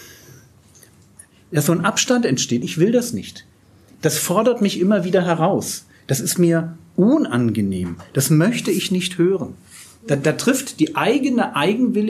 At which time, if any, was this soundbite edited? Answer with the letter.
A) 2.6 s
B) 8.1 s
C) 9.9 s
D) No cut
A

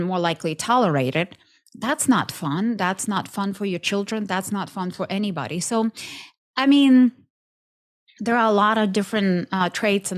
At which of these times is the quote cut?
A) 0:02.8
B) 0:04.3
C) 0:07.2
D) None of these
A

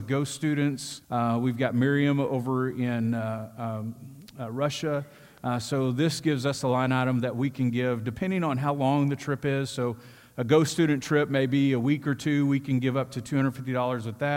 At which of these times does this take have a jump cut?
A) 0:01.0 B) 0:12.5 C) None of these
A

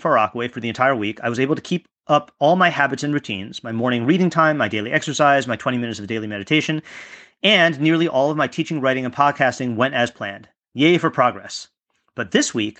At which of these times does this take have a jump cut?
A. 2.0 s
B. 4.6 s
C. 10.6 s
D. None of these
A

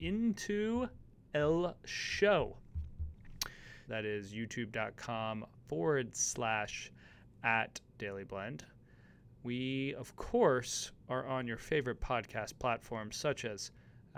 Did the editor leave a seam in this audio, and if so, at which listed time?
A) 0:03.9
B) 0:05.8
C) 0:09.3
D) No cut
A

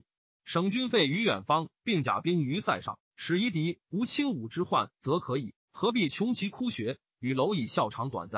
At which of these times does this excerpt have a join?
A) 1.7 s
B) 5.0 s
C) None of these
C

